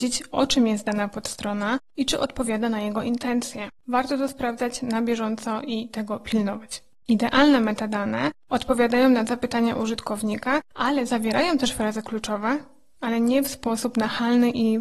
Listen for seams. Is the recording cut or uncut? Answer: cut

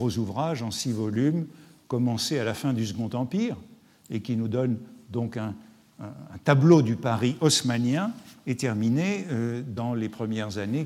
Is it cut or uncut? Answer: uncut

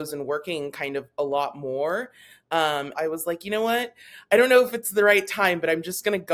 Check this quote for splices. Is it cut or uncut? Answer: cut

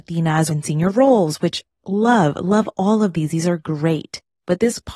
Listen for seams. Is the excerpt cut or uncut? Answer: uncut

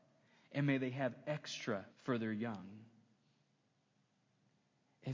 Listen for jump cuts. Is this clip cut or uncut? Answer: cut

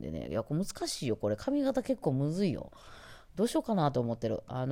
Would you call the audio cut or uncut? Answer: uncut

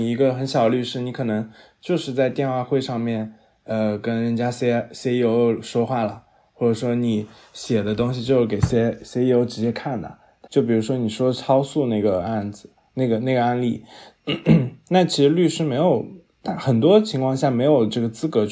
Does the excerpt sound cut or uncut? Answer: cut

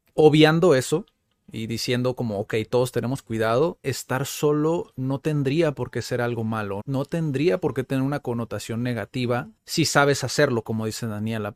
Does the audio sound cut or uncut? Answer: cut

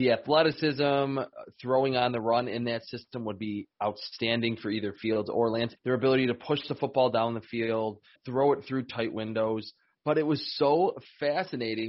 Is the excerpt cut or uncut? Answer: cut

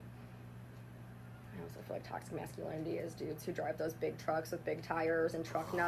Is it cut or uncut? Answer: uncut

